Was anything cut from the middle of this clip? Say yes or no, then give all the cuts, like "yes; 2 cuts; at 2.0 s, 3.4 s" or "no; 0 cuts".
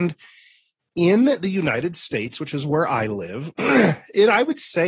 no; 0 cuts